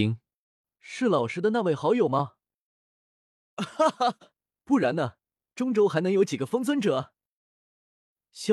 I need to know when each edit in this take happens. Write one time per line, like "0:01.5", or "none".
none